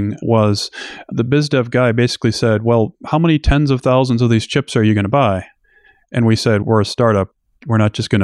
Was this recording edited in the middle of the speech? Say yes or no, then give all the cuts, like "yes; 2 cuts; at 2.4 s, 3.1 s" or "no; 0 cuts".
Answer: no; 0 cuts